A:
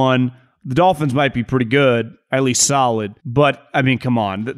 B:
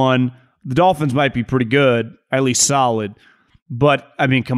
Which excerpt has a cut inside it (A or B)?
A